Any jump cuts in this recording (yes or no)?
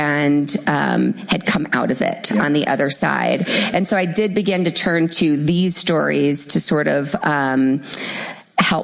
no